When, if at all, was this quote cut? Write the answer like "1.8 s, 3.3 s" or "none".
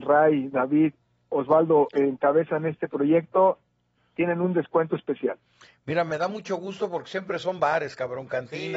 none